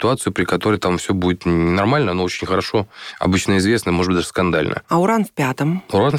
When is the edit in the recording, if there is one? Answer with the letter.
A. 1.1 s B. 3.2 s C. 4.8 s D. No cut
D